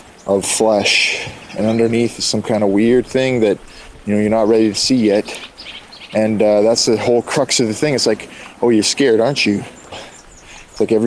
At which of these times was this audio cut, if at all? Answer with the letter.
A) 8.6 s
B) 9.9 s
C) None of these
B